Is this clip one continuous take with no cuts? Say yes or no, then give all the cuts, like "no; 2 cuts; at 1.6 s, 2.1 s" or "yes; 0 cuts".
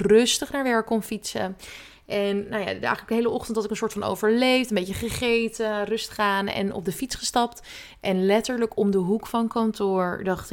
yes; 0 cuts